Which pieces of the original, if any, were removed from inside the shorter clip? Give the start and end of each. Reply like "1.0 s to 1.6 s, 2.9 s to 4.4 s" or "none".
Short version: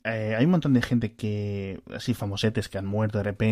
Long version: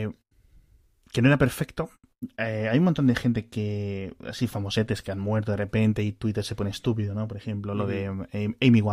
none